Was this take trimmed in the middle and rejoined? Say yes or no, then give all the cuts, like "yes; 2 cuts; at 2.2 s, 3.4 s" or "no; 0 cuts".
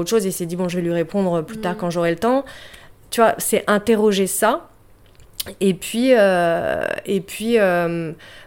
no; 0 cuts